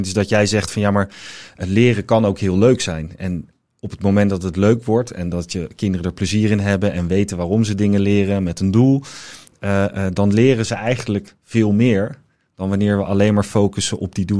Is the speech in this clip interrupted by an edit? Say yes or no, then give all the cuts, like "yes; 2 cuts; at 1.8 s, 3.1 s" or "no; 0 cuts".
no; 0 cuts